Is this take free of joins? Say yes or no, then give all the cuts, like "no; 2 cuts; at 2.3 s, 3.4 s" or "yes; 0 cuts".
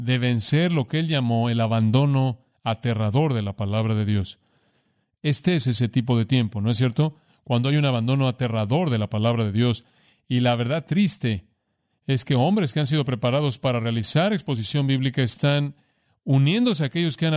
yes; 0 cuts